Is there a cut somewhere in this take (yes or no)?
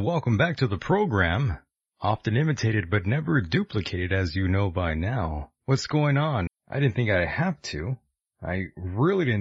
yes